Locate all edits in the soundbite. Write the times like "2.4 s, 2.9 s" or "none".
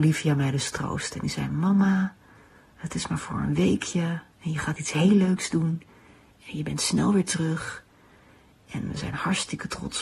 none